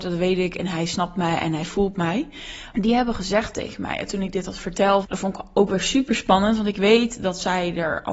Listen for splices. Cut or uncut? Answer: cut